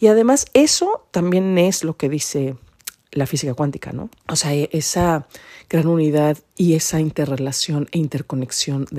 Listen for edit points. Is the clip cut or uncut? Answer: cut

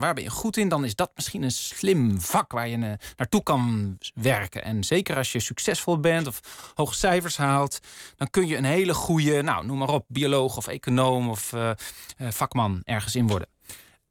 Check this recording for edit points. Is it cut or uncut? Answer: uncut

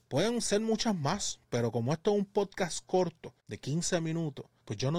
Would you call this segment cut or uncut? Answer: uncut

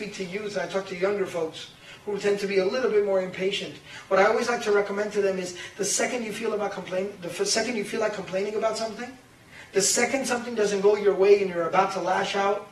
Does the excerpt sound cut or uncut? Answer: uncut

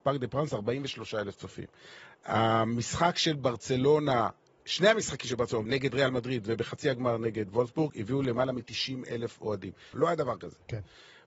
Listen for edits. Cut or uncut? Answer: cut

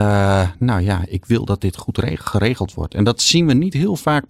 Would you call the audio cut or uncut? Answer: uncut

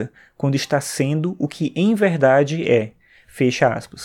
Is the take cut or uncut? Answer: uncut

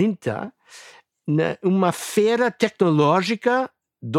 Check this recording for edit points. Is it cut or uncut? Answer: uncut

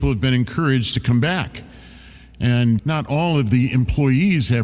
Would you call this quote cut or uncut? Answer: cut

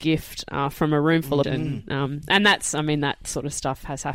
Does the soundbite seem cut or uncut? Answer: cut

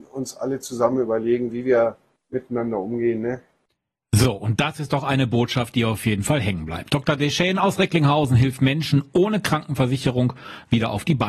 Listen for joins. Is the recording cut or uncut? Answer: uncut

